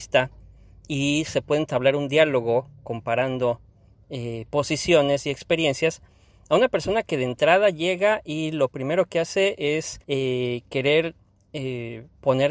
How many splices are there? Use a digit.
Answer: 1